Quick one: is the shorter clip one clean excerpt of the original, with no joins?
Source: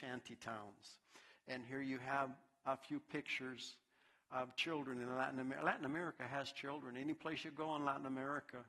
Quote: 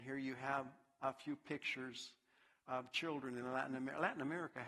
yes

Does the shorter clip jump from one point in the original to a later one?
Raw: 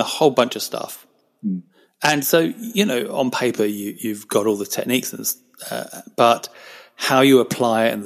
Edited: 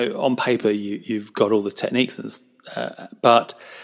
no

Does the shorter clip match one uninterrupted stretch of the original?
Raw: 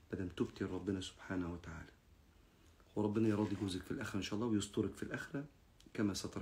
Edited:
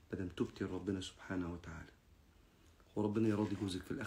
yes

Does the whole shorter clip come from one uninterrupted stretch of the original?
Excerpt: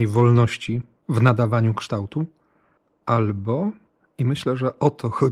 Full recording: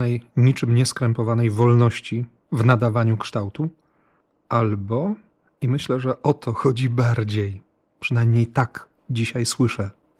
yes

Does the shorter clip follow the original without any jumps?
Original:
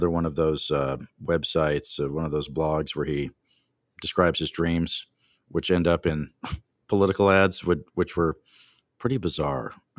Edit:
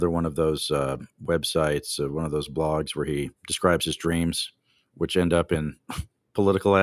no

